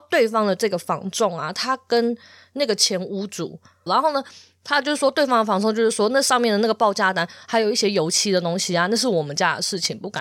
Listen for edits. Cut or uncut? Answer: cut